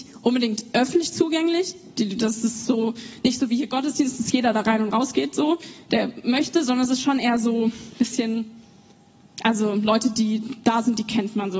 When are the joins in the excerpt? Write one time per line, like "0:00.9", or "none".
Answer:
none

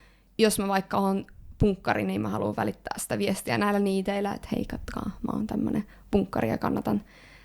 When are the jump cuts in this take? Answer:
none

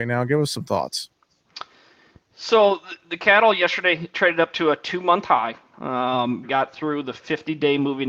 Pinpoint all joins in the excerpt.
0:06.4

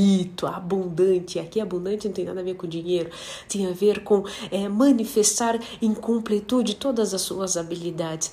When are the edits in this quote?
none

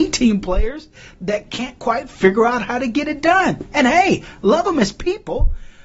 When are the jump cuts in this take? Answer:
none

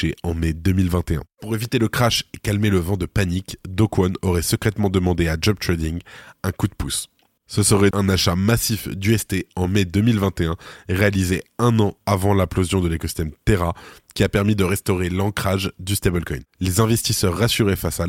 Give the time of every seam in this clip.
0:07.9

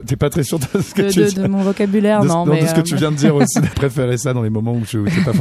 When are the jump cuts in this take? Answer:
0:01.4
0:03.7

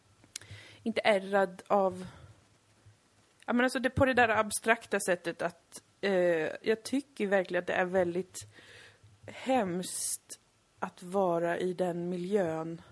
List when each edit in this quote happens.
0:06.6

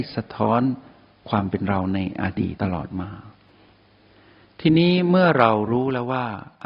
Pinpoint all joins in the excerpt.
0:02.6

